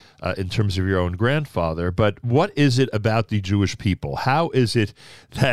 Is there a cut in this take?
no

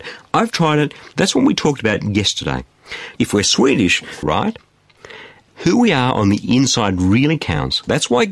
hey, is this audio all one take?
no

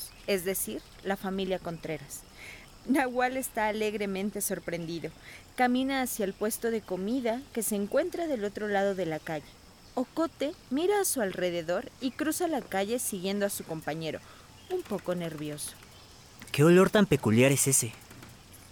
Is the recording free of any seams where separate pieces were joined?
yes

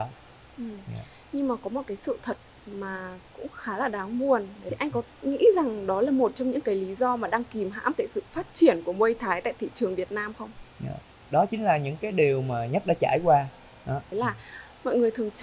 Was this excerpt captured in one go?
no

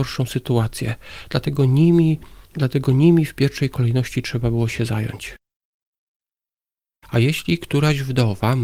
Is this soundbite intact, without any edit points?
no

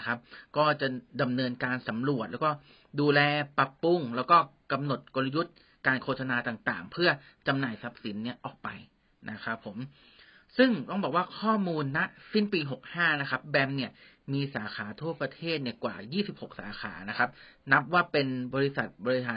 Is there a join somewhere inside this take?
no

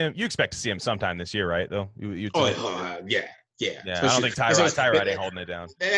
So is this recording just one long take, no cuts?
yes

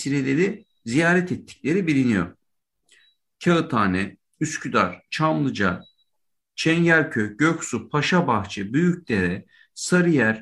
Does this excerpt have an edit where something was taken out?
no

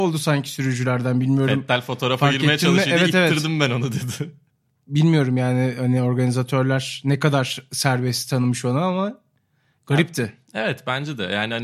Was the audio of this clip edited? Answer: no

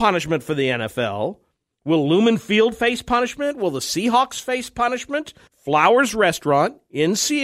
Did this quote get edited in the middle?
yes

